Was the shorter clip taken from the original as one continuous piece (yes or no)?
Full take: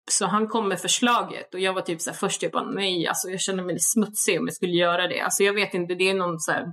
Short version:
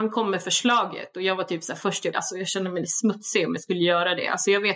no